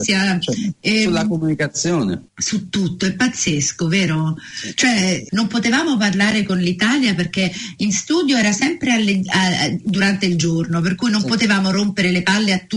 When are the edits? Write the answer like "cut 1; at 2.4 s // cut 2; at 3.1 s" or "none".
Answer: cut 1; at 2.3 s // cut 2; at 5.3 s